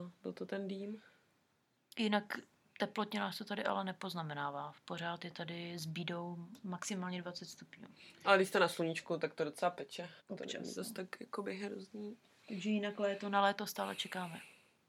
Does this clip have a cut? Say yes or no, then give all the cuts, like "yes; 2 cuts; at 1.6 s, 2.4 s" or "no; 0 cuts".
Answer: yes; 1 cut; at 10.2 s